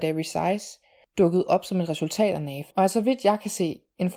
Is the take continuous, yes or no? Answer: no